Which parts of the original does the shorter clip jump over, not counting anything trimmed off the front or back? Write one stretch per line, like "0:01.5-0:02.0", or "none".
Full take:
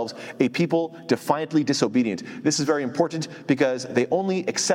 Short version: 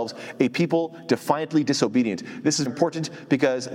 0:02.7-0:02.8